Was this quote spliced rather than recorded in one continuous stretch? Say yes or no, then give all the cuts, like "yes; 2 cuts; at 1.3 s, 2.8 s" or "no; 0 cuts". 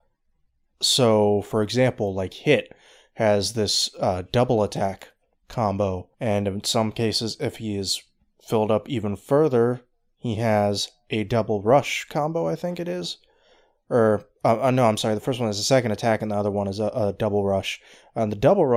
yes; 1 cut; at 6.1 s